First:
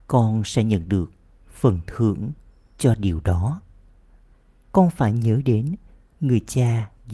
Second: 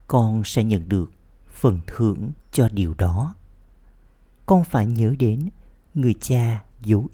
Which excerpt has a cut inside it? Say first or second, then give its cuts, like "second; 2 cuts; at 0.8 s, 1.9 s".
second; 1 cut; at 2.4 s